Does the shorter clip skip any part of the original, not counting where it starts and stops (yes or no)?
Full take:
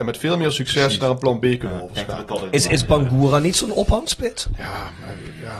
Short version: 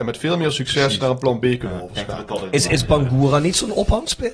no